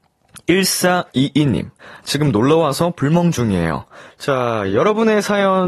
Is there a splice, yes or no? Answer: yes